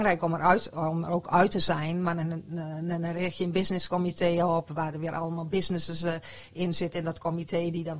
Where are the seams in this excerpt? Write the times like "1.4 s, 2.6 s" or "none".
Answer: none